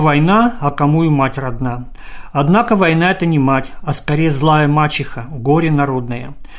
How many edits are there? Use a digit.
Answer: 0